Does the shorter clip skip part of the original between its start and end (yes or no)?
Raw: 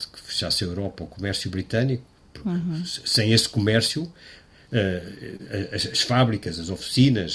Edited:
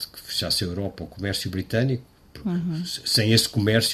no